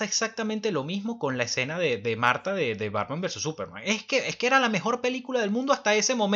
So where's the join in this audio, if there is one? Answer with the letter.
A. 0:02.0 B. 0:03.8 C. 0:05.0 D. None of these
D